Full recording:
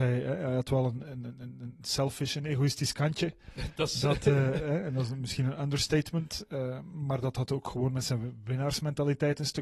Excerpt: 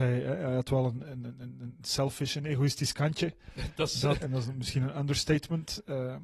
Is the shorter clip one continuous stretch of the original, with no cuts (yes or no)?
no